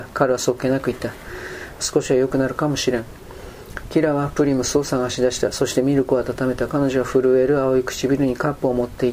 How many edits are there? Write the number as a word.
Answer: one